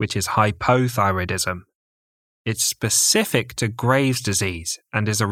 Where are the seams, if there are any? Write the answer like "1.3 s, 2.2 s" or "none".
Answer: 2.3 s